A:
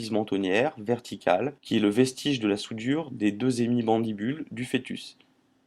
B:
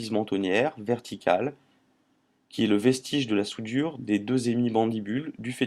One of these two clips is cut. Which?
A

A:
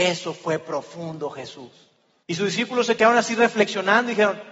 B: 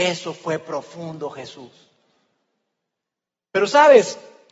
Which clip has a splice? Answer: A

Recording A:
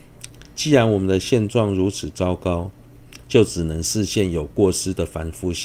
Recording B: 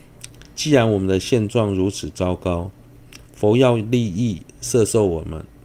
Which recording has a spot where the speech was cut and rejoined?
A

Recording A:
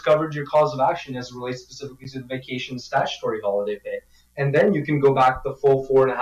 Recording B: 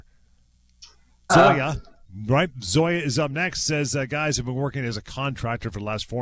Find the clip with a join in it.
B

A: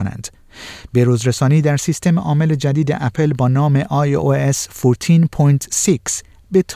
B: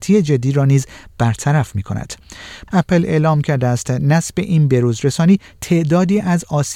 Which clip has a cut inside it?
B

